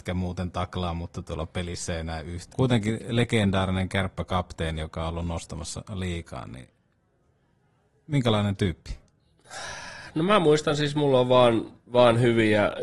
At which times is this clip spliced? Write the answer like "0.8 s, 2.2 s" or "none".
2.5 s